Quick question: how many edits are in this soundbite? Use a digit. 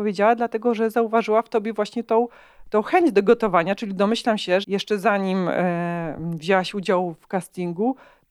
1